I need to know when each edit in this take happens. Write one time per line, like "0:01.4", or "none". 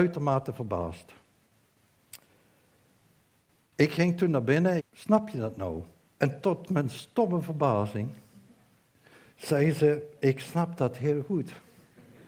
0:04.8
0:06.1

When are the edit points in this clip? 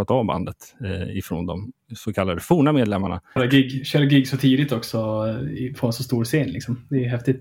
0:03.4

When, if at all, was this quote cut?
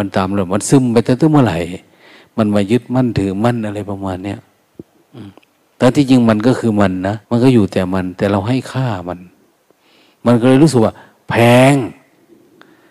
0:07.2

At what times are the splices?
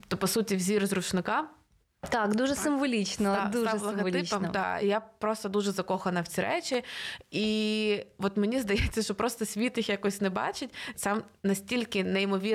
0:04.8
0:10.9

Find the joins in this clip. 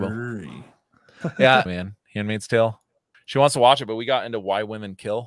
0:01.7
0:03.1

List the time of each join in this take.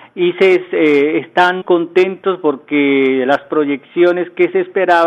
0:01.6

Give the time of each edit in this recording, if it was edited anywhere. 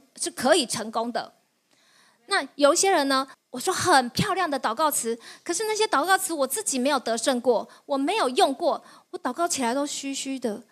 0:03.3

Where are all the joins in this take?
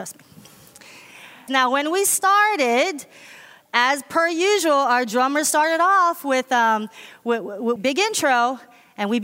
0:01.5
0:07.8

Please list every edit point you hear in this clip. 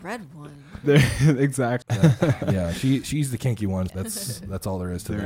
0:01.8
0:03.9

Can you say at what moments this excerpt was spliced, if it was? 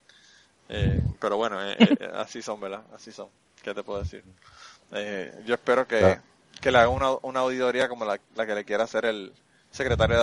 none

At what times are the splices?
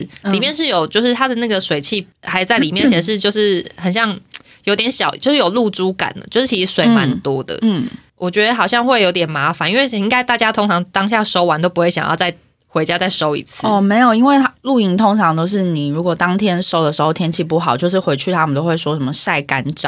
none

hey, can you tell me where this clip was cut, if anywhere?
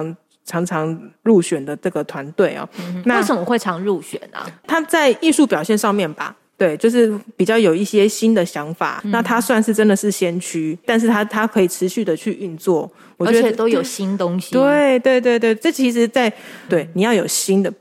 0:10.8
0:16.7

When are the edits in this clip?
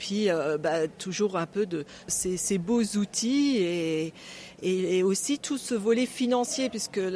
0:02.1

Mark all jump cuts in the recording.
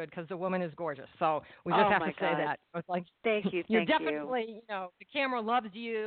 none

